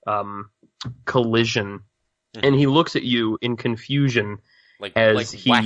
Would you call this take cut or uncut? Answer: uncut